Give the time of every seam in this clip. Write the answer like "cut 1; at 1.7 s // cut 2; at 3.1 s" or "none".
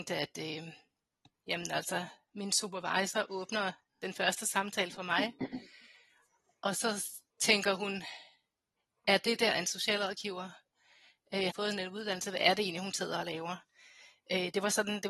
cut 1; at 11.5 s